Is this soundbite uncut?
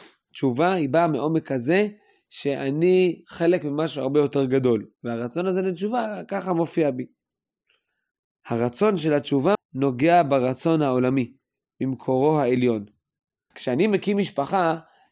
no; 2 cuts; at 9.5 s, 13.5 s

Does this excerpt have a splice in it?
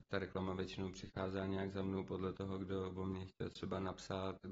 no; 0 cuts

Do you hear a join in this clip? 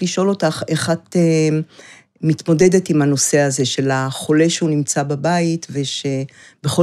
no; 0 cuts

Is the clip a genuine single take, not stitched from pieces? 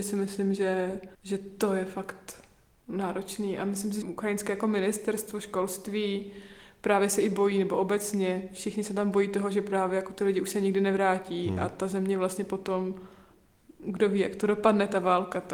no; 2 cuts; at 1.1 s, 4.0 s

